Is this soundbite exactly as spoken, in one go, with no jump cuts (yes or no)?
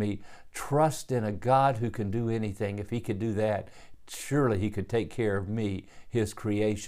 yes